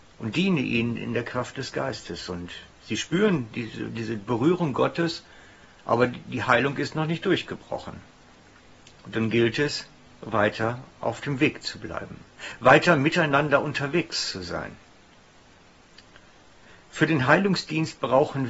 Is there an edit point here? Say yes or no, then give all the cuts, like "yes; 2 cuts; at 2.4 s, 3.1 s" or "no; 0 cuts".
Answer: no; 0 cuts